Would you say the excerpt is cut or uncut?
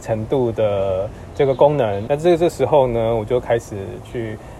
cut